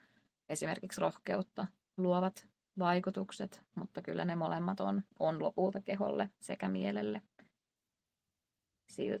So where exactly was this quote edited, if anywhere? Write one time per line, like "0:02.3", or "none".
none